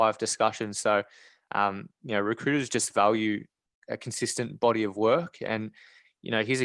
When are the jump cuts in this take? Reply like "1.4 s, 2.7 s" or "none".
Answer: none